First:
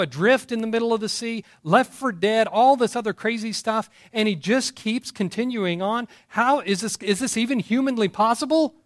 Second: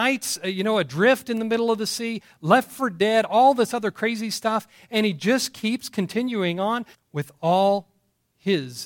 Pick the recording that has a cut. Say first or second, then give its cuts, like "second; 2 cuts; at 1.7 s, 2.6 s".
second; 1 cut; at 6.9 s